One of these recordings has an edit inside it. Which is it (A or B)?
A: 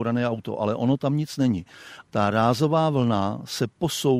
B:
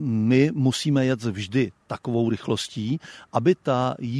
A